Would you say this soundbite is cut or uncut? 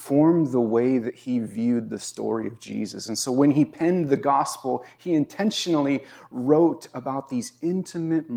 uncut